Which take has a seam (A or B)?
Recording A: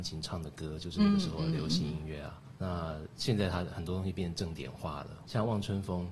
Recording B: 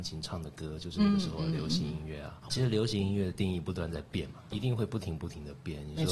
B